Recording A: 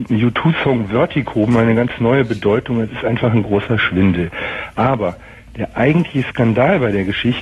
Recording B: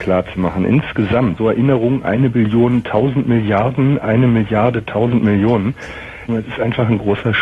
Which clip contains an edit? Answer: B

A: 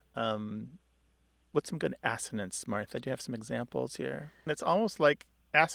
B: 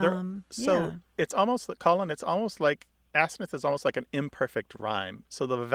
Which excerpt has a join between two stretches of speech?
A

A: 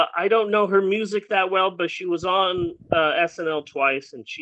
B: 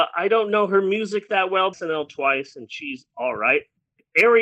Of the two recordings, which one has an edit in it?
B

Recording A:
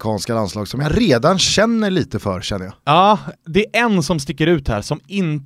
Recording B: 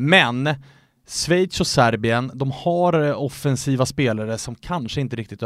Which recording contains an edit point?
A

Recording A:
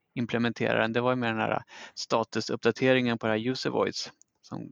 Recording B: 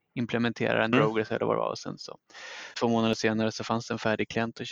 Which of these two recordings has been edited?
B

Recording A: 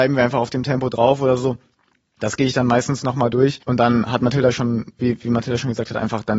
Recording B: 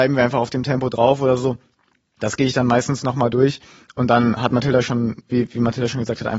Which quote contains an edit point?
A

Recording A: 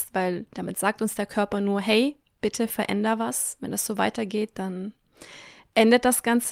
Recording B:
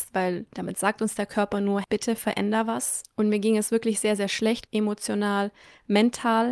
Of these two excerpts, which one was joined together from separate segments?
B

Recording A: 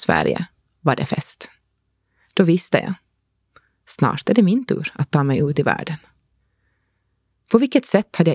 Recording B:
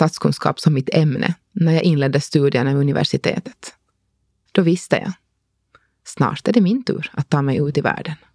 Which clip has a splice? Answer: B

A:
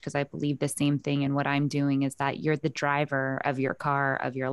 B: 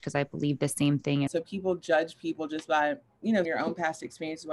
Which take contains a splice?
B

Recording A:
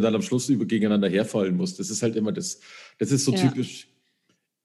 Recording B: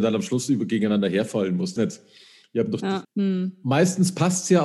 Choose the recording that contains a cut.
B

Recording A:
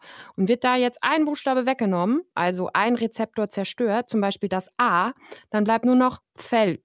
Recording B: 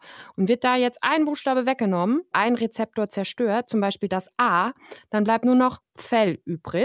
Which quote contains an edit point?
B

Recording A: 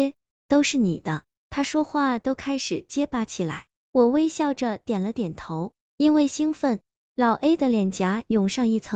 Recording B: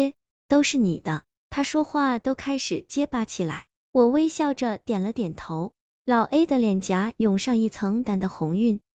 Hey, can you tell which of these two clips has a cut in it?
B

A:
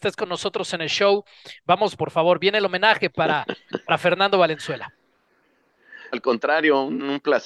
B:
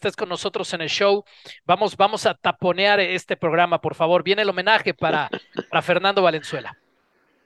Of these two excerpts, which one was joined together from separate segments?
A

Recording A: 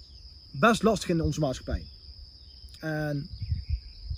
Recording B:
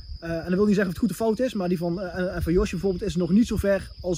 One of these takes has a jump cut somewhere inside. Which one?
A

